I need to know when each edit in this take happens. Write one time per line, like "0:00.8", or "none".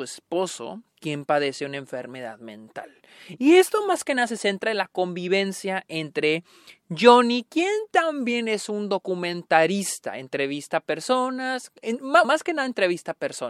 0:12.2